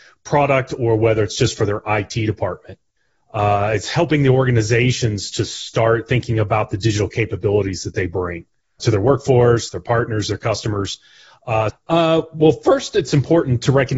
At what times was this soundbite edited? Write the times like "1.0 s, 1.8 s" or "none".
8.8 s, 11.7 s